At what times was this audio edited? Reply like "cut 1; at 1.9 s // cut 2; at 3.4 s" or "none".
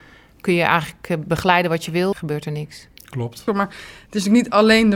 cut 1; at 2.1 s // cut 2; at 3.5 s

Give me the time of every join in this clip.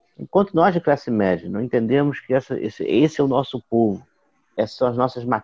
none

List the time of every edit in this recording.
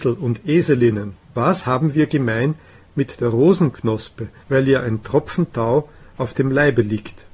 cut 1; at 1.2 s // cut 2; at 4.4 s

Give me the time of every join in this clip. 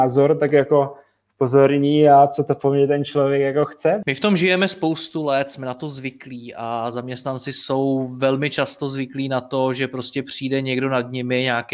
cut 1; at 4.0 s

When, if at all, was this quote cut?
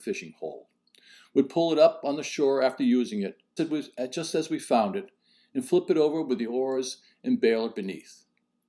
cut 1; at 3.6 s

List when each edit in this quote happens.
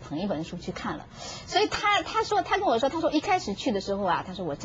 none

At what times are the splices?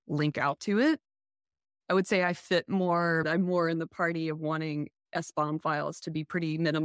cut 1; at 3.2 s

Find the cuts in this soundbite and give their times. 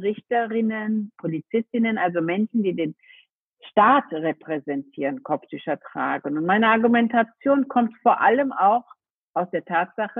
none

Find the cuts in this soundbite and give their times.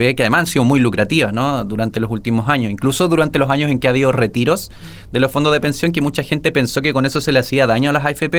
none

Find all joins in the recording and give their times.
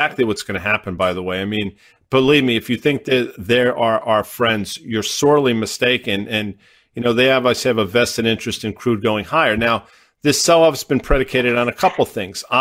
none

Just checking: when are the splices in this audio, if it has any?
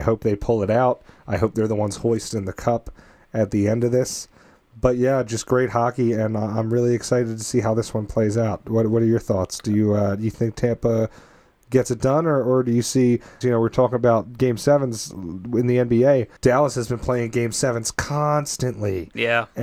cut 1; at 13.4 s // cut 2; at 16.4 s

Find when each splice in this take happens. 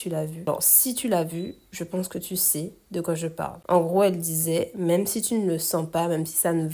none

